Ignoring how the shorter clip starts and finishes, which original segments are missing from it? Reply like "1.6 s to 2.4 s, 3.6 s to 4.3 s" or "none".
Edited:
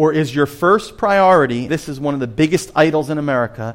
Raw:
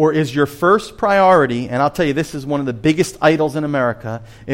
1.7 s to 2.1 s